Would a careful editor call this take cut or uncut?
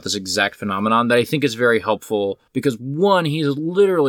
cut